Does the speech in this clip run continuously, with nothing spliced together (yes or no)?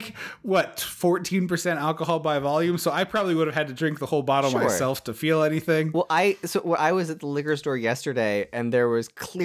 yes